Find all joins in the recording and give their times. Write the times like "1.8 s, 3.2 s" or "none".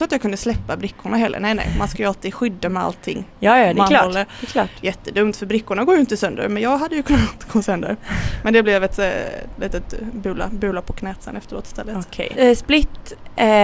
12.3 s